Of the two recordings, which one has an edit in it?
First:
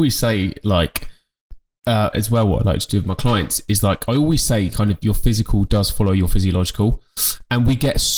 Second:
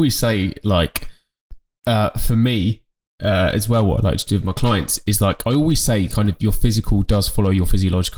first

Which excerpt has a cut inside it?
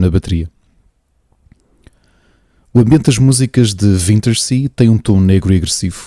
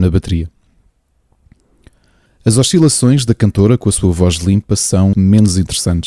second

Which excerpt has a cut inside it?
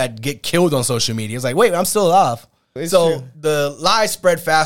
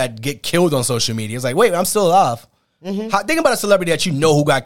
first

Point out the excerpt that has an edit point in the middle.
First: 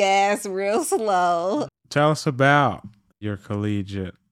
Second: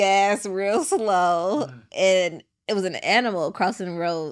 first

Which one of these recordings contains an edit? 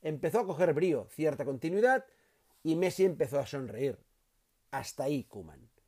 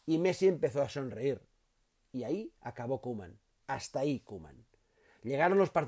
first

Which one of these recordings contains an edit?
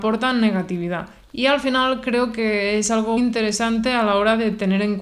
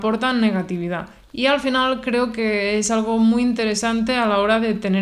first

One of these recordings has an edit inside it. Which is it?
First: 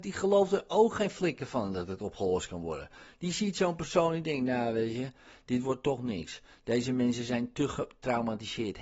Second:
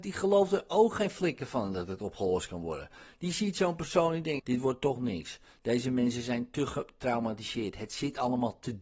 second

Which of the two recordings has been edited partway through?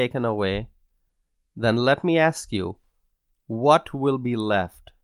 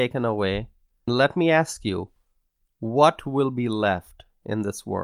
second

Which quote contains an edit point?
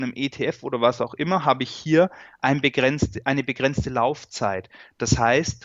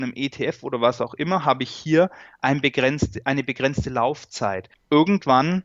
second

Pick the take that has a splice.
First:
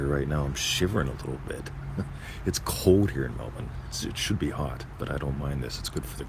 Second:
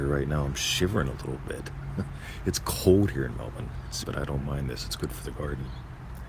second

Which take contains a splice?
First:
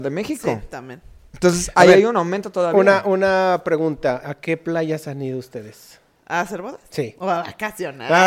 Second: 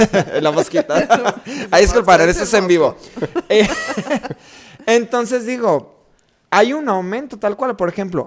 first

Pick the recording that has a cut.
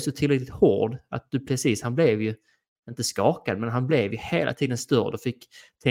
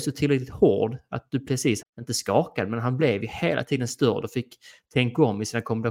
second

